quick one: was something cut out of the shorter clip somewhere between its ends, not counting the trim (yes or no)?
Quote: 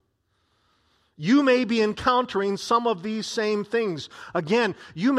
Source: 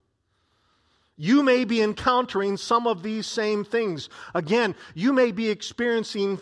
no